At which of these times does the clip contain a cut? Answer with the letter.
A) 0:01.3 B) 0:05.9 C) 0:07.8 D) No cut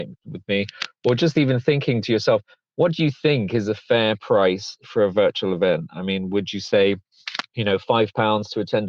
D